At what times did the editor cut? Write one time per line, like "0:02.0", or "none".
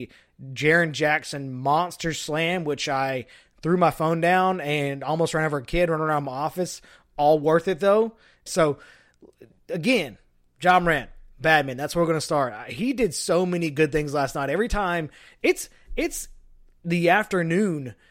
0:08.5